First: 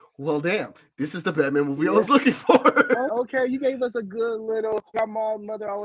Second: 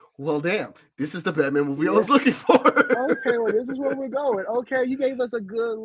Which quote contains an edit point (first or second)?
first